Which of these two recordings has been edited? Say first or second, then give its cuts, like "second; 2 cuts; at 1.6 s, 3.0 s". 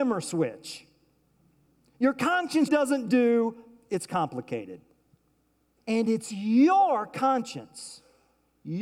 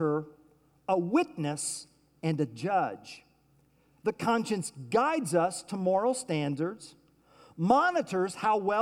first; 2 cuts; at 2.7 s, 5.8 s